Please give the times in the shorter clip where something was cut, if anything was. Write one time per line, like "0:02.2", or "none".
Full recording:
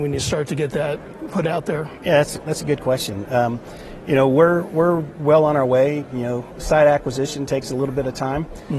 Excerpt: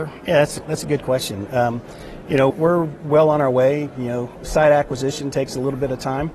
0:02.5